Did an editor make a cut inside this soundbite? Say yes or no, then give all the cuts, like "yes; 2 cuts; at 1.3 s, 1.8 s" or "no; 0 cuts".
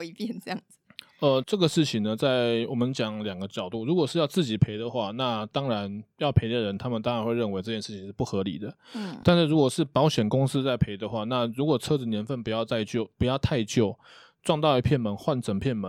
yes; 1 cut; at 1.4 s